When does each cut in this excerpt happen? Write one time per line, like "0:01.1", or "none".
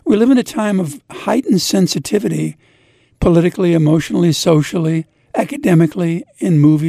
none